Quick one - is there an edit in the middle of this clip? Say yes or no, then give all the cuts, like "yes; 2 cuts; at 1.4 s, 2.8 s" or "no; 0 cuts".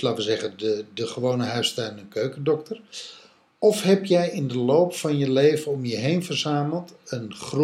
no; 0 cuts